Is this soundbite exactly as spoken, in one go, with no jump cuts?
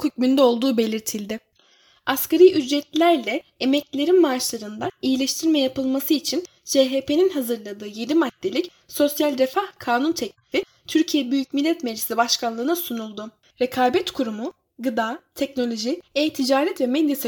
no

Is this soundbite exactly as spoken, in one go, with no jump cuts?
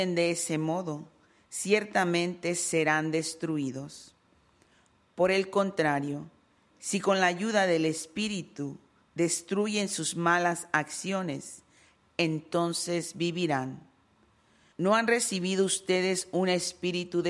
no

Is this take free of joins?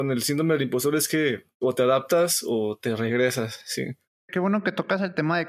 yes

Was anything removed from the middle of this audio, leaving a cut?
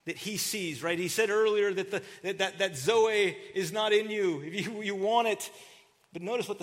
no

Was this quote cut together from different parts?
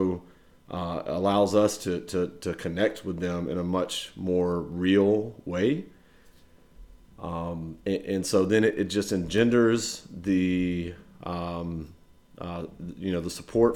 yes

